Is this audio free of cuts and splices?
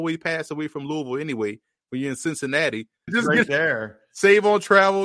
no; 1 cut; at 3.1 s

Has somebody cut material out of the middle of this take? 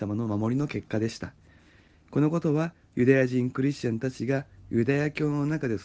no; 0 cuts

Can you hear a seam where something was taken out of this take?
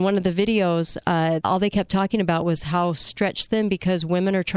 yes; 1 cut; at 1.4 s

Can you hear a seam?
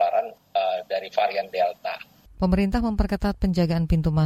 yes; 1 cut; at 2.3 s

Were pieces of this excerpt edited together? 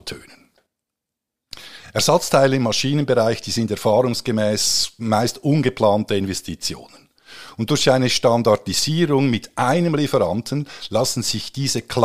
no; 0 cuts

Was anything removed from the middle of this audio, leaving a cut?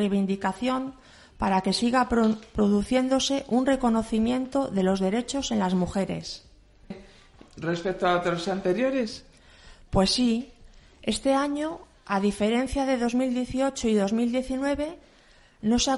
yes; 1 cut; at 6.9 s

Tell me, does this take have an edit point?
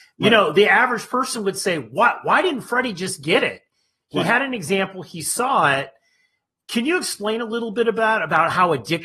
no; 0 cuts

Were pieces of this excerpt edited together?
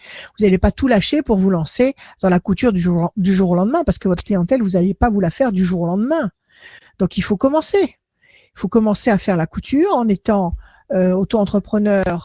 no; 0 cuts

